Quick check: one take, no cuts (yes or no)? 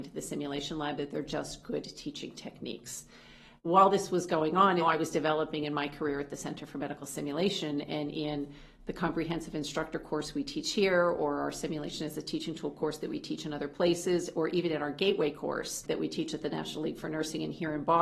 no